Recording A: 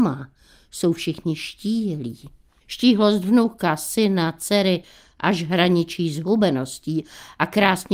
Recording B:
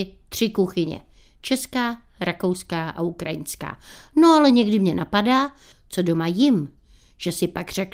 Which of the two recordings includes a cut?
B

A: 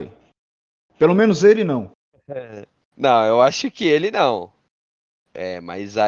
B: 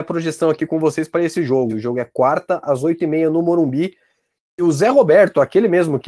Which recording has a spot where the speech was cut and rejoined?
B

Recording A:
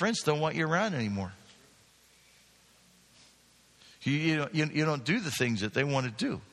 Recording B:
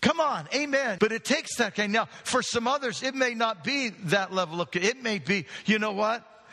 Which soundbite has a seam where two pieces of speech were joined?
B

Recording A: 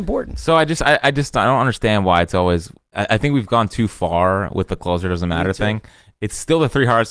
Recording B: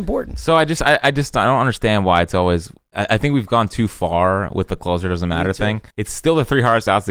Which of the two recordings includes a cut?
B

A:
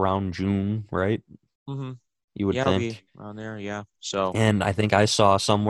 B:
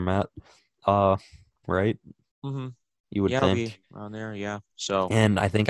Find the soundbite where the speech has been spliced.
B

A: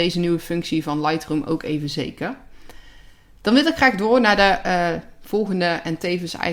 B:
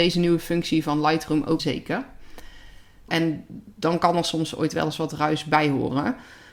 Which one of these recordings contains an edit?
B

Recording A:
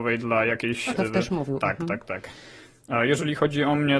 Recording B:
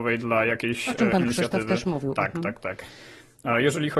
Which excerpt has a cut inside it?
A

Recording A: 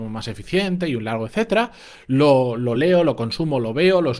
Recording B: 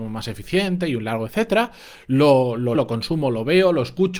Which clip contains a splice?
B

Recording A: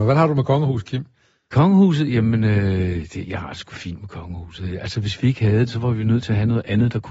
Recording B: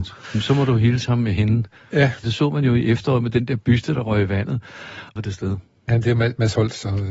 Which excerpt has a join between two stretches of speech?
B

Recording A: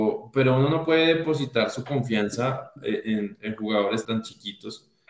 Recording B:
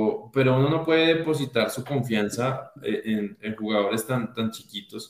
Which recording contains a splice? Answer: A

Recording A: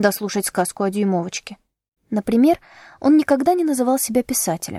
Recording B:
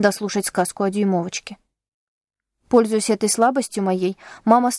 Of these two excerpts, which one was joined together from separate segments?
A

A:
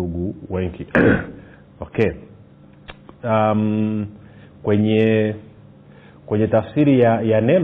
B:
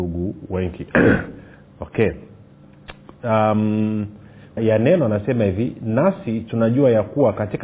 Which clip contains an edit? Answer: B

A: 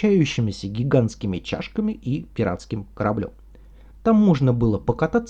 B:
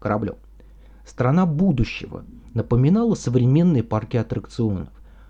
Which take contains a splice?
A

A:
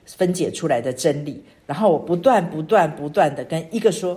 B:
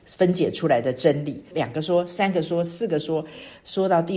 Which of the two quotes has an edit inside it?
B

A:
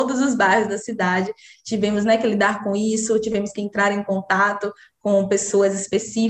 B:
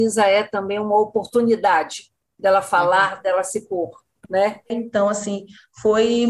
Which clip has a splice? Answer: B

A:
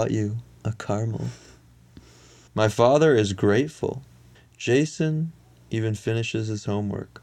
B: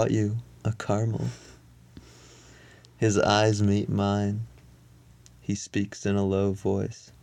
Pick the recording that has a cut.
A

